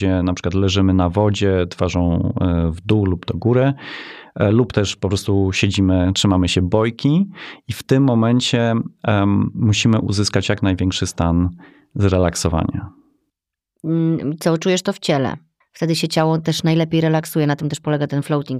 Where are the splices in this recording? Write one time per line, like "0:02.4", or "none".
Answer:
0:15.6